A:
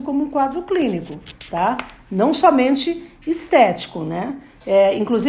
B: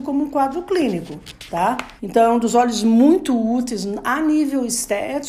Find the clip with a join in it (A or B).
B